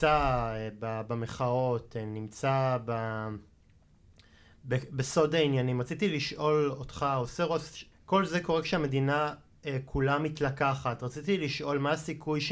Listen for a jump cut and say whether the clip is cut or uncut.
cut